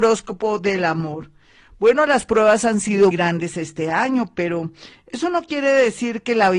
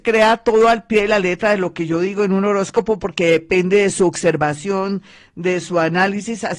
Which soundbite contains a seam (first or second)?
first